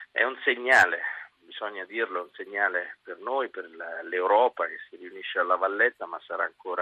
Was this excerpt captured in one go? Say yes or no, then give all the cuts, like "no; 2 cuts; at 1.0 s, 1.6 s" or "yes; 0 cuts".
yes; 0 cuts